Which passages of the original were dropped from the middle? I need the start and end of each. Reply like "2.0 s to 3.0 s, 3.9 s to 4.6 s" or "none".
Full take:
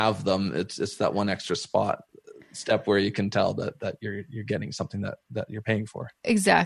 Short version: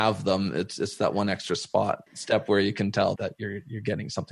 2.1 s to 2.4 s, 3.5 s to 3.8 s